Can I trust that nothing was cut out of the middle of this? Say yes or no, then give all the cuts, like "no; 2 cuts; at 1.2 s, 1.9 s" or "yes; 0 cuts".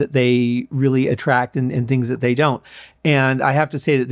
yes; 0 cuts